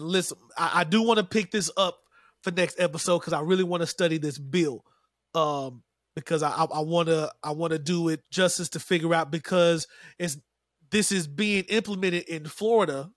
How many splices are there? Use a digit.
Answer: 1